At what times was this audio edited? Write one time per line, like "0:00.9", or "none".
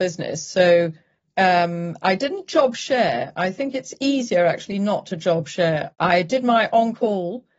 0:05.9